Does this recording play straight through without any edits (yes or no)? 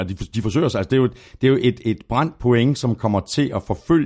yes